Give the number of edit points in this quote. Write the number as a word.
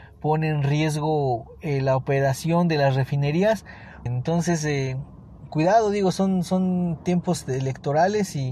two